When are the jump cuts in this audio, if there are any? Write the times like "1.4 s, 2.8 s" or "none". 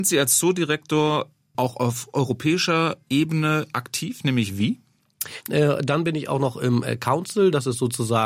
1.5 s, 5.4 s